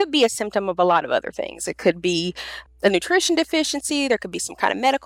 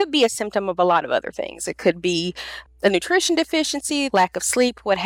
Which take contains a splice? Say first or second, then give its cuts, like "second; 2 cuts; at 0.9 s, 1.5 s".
second; 1 cut; at 4.1 s